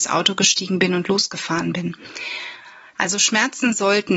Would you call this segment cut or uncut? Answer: cut